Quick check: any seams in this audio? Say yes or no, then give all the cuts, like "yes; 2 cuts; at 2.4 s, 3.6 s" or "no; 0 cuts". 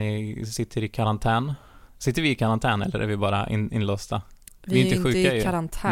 no; 0 cuts